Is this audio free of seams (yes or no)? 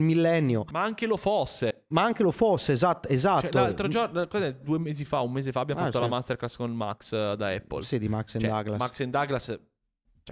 yes